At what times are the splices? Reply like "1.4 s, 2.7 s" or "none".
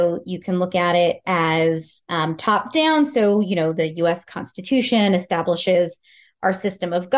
none

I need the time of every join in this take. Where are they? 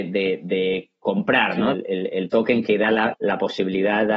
1.7 s, 3.1 s

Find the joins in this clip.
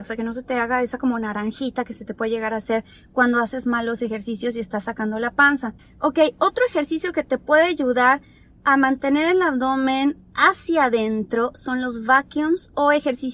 none

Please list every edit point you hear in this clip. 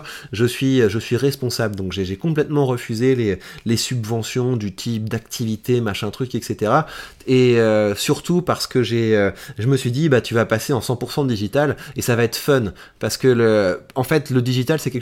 none

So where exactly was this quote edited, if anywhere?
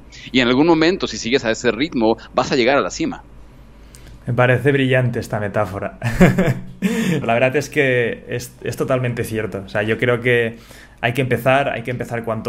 7.2 s

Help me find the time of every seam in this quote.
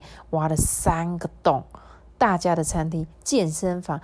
3.1 s

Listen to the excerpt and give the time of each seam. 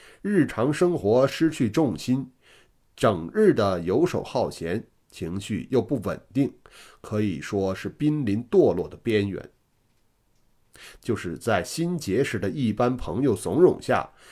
10.9 s

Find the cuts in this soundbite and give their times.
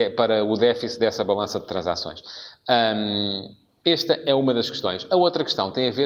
none

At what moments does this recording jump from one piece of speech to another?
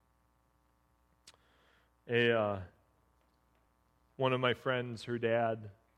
none

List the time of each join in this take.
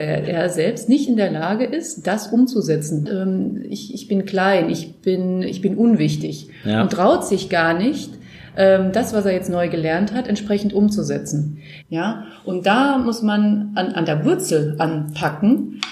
3.1 s, 11.8 s

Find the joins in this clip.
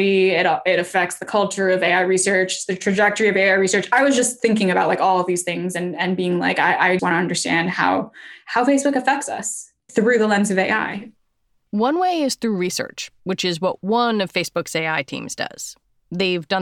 7.0 s

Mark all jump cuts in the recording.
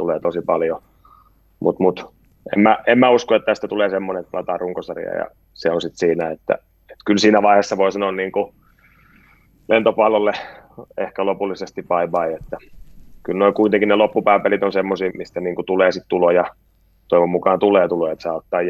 15.1 s

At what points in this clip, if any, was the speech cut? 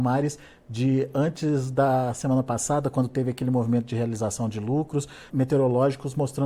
5.3 s

